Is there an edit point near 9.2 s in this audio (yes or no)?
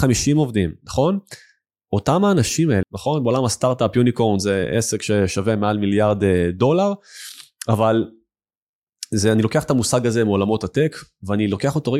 no